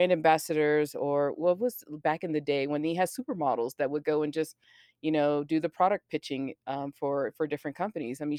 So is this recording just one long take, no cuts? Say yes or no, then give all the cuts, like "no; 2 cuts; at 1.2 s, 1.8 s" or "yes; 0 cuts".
yes; 0 cuts